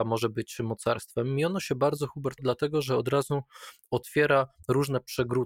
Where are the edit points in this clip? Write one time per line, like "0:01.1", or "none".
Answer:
0:02.4